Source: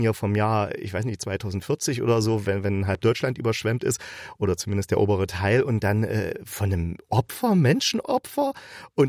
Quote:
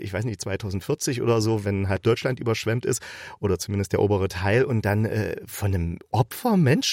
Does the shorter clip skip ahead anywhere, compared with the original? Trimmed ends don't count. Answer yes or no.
yes